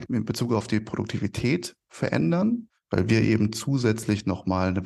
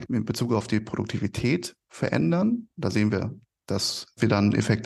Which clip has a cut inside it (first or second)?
first